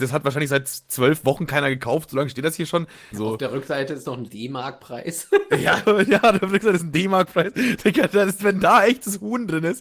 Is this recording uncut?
no; 2 cuts; at 3.1 s, 5.8 s

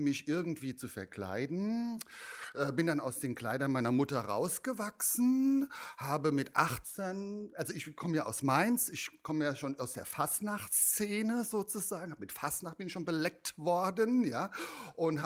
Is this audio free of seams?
yes; 0 cuts

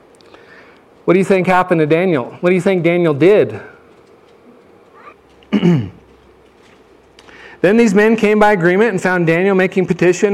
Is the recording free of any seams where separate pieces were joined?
no; 1 cut; at 5.1 s

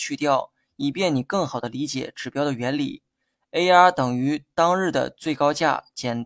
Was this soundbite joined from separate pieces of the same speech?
yes; 1 cut; at 3.3 s

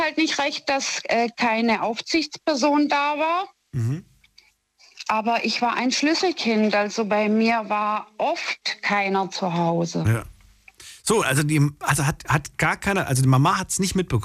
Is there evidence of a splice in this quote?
no; 0 cuts

